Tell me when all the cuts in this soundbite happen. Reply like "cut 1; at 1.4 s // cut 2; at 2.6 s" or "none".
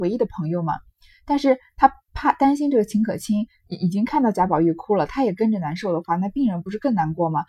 none